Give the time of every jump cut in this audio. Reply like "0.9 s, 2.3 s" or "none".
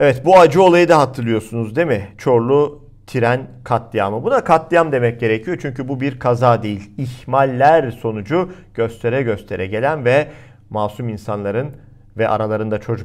none